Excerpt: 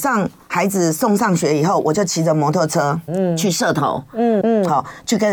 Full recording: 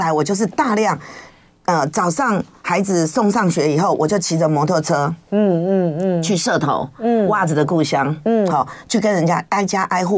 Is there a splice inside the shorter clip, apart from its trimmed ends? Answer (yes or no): yes